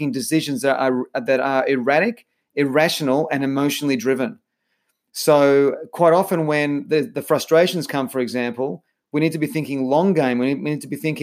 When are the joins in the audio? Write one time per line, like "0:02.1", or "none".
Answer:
none